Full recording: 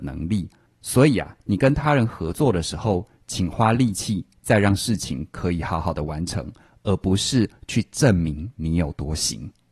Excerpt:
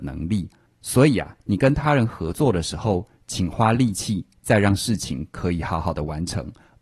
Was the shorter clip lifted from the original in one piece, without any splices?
yes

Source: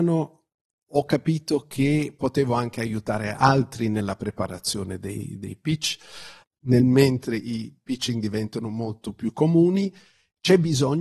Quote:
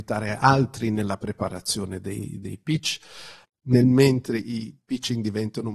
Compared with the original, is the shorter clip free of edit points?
yes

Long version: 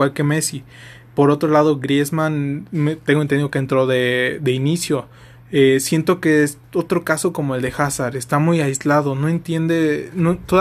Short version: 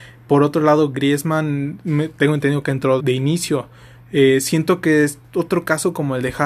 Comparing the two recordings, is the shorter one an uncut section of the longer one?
no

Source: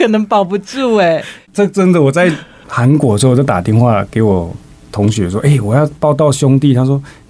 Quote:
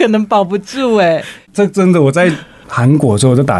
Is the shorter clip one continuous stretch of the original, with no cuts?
yes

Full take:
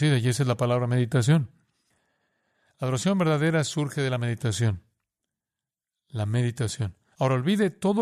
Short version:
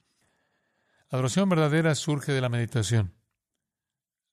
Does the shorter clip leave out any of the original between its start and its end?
no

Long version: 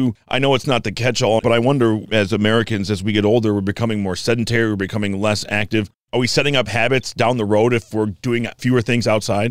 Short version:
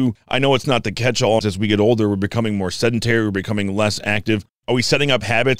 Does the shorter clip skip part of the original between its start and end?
yes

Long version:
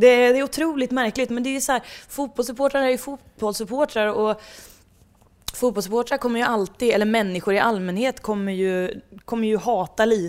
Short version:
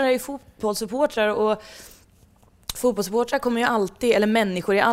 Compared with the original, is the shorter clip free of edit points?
yes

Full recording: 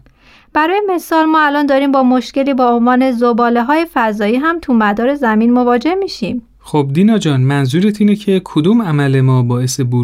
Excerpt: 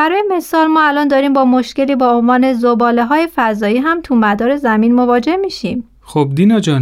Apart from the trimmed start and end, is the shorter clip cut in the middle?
no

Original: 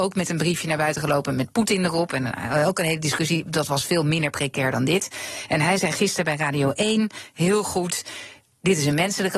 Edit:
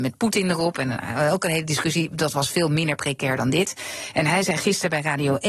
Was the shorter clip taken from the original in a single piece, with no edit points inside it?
yes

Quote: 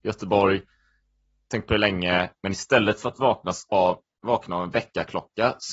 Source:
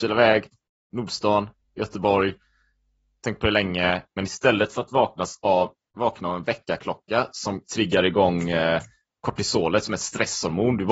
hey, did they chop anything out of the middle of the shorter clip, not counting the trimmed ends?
no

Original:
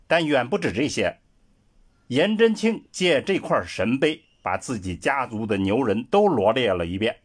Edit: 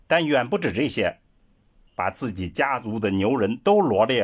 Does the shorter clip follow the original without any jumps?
no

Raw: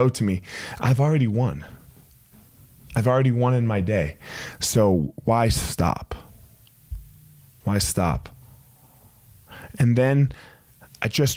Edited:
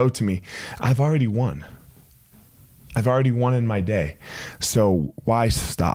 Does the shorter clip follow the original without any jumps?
yes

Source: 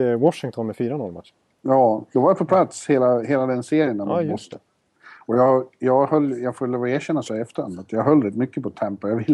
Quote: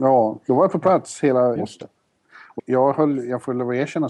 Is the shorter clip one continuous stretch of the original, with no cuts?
no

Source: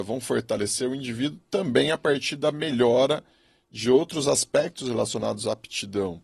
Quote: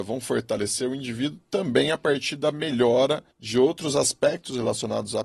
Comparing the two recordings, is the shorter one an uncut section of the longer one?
no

